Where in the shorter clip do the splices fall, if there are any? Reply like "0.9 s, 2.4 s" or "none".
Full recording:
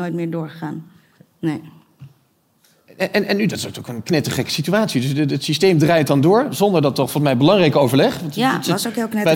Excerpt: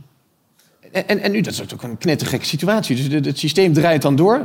none